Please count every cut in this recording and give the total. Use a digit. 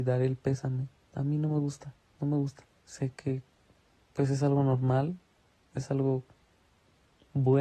0